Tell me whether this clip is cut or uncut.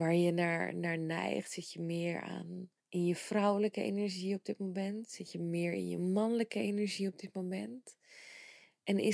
cut